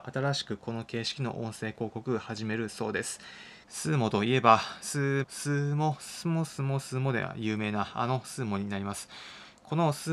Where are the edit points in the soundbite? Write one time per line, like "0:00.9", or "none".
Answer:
0:03.6
0:05.2